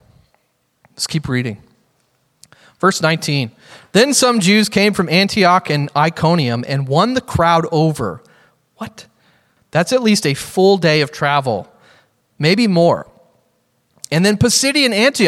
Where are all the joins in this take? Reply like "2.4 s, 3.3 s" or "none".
9.6 s